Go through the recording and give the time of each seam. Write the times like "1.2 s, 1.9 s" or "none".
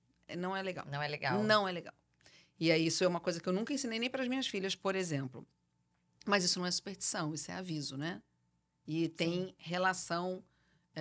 none

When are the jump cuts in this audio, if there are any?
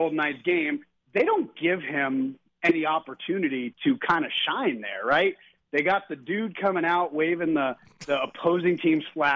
3.7 s

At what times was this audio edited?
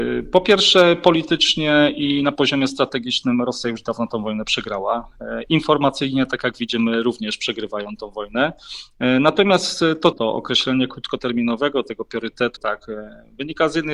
10.1 s, 12.6 s

